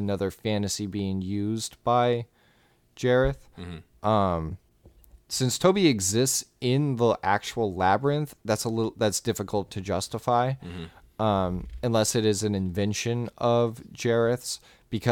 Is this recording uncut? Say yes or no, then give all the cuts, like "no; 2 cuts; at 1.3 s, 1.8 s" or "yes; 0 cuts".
yes; 0 cuts